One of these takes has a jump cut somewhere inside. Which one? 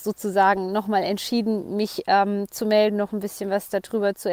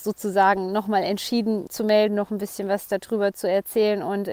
second; 1 cut; at 1.7 s

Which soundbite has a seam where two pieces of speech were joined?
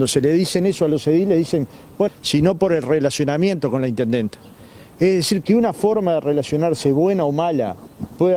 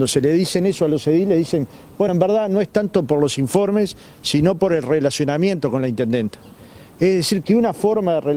first; 1 cut; at 2.1 s

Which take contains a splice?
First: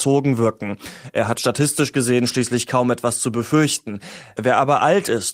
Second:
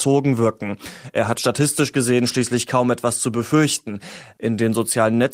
second; 1 cut; at 4.3 s

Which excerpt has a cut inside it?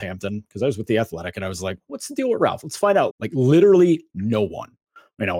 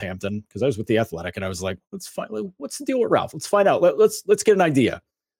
first; 2 cuts; at 1.9 s, 3.1 s

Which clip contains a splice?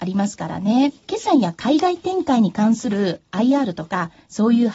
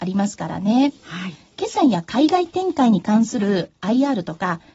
first; 1 cut; at 1.0 s

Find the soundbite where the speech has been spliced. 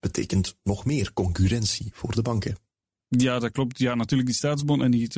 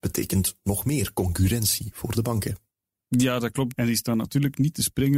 second; 1 cut; at 3.7 s

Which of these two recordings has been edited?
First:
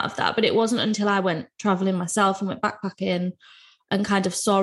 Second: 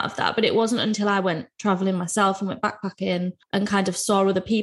second; 1 cut; at 3.4 s

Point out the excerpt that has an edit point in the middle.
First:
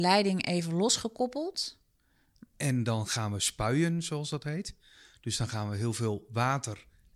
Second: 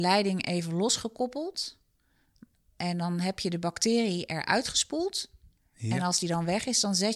first; 1 cut; at 2.5 s

